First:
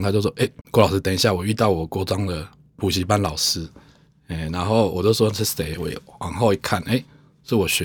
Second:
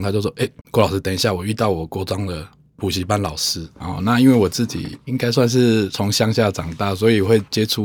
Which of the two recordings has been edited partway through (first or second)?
second